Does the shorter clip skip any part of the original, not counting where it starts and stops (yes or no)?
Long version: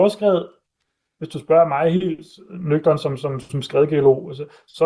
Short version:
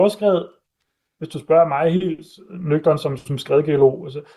yes